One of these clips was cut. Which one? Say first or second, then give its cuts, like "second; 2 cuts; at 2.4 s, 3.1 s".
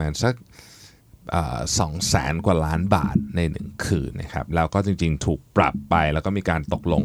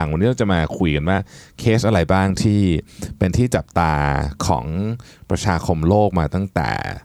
first; 1 cut; at 4.1 s